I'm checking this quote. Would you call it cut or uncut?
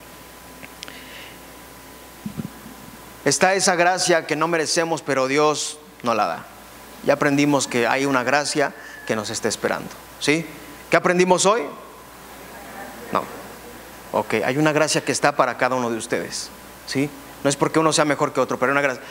uncut